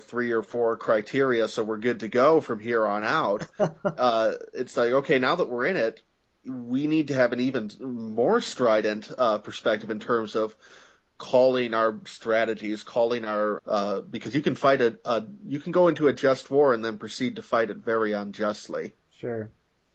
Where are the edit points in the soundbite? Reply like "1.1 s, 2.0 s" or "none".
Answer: 13.6 s